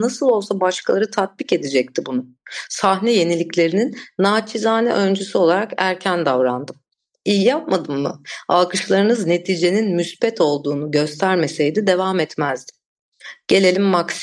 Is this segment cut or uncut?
uncut